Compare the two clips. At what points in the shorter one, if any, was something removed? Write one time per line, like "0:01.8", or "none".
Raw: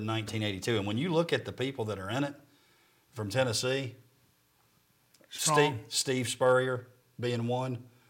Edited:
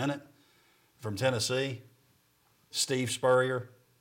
0:02.7